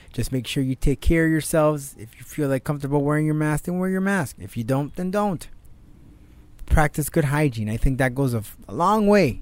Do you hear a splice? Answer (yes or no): no